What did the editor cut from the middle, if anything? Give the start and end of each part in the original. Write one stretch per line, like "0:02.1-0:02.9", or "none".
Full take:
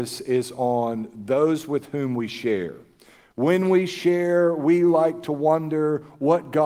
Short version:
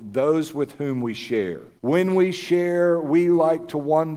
0:02.9-0:03.3